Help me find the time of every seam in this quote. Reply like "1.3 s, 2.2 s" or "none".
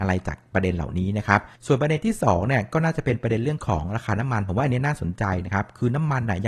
1.6 s